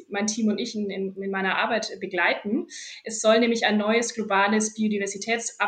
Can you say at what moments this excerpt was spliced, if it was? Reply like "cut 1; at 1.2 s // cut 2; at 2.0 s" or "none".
none

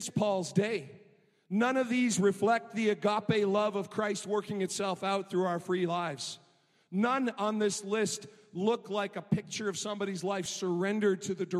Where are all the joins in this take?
none

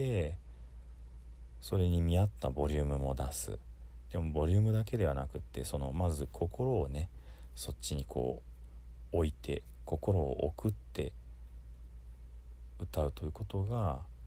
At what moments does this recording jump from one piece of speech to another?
none

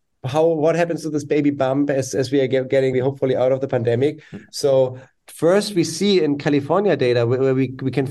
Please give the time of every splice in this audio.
cut 1; at 2.9 s

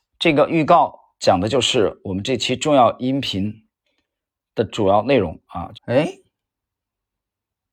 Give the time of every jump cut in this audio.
cut 1; at 5.7 s

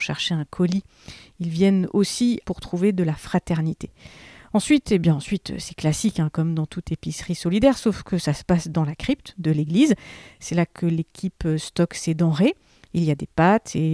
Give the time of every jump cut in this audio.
cut 1; at 2.4 s

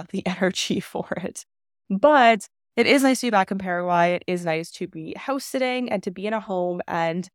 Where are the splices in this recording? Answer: none

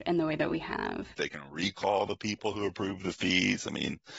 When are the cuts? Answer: cut 1; at 1.1 s

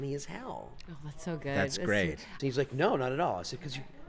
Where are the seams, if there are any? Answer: cut 1; at 2.4 s

